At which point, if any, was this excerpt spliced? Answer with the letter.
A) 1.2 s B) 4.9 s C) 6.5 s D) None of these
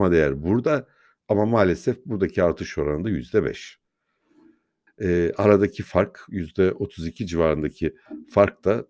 B